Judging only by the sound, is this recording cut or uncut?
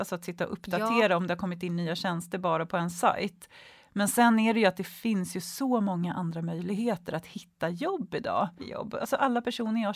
cut